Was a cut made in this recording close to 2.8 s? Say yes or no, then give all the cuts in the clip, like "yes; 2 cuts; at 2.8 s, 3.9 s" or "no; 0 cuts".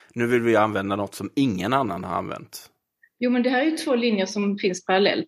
no; 0 cuts